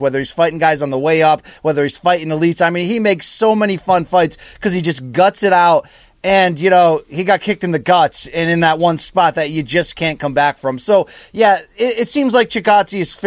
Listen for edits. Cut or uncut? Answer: uncut